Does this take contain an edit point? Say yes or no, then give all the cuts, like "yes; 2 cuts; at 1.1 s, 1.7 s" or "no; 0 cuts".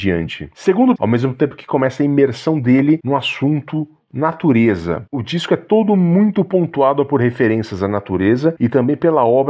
yes; 1 cut; at 1.0 s